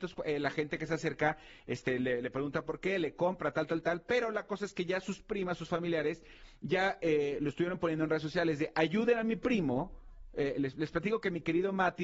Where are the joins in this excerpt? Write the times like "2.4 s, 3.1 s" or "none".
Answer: none